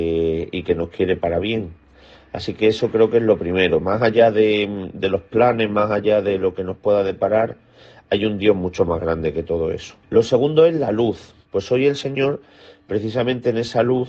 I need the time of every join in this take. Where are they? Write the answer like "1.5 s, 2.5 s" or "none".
10.0 s, 11.4 s